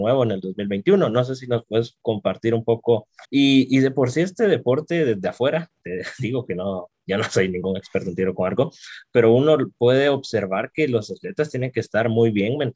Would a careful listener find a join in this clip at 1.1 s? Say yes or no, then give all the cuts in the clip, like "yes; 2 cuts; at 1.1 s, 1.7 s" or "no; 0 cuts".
no; 1 cut; at 3.2 s